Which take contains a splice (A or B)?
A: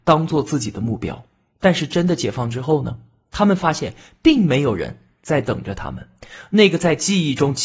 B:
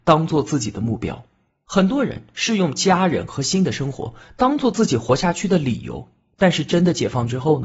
A